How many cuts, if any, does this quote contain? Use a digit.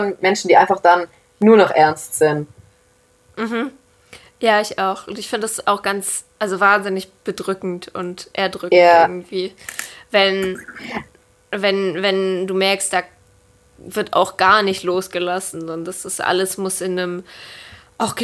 0